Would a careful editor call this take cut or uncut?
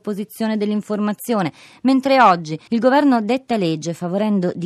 cut